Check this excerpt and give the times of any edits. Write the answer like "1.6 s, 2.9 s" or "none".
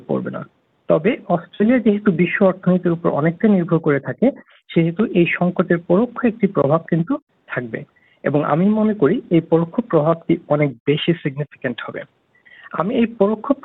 none

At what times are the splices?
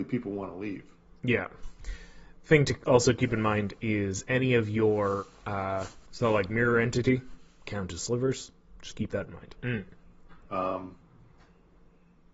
6.1 s, 9.6 s

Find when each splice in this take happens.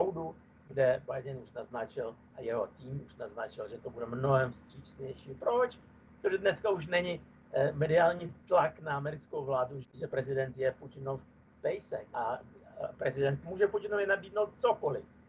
9.8 s, 12.1 s, 13.4 s

